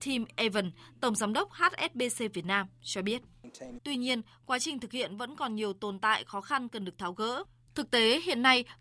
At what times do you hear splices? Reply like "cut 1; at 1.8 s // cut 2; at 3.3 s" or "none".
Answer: cut 1; at 3.8 s // cut 2; at 7.7 s